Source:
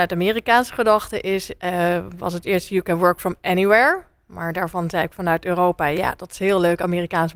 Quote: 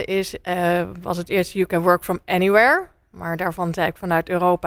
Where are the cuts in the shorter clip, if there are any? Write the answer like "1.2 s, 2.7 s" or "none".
none